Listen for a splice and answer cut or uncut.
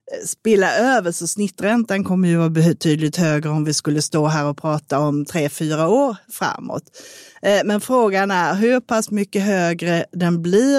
uncut